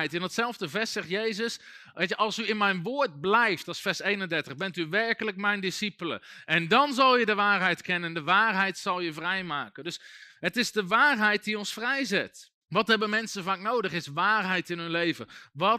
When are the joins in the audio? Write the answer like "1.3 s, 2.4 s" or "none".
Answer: 12.6 s